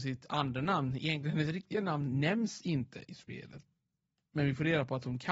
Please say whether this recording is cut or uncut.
uncut